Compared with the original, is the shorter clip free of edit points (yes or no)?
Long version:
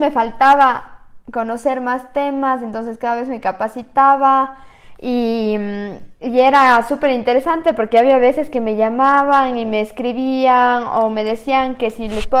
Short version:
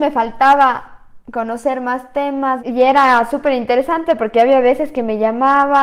no